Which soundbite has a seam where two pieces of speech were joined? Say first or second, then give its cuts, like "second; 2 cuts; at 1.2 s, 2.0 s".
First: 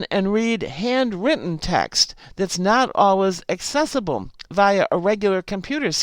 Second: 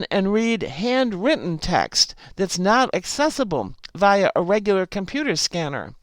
second; 1 cut; at 2.9 s